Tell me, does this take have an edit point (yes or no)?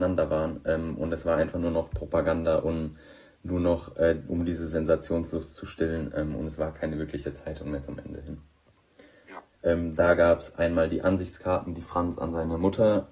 yes